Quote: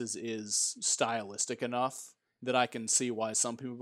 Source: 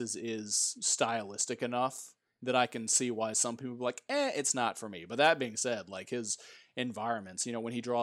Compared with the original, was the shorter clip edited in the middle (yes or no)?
no